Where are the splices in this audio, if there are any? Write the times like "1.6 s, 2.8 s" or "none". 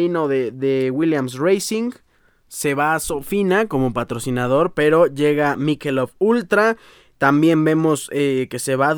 none